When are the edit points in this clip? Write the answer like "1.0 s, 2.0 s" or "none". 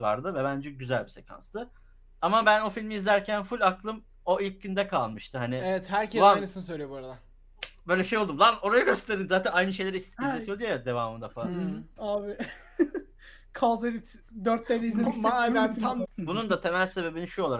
12.0 s, 16.0 s